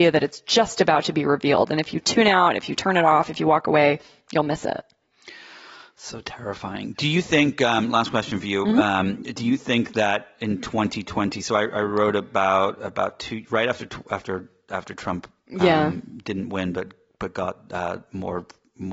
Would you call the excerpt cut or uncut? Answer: uncut